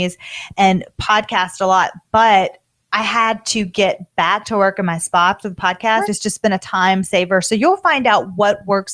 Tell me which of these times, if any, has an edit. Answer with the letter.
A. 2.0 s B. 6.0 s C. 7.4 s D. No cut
B